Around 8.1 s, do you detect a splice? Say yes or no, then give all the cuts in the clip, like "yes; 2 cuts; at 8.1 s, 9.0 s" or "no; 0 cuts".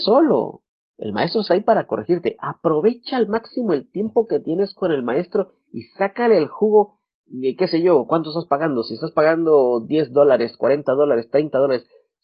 no; 0 cuts